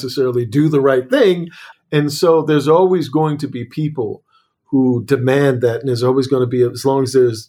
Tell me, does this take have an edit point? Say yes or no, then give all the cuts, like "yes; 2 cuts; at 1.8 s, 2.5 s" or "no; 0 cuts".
yes; 1 cut; at 1.7 s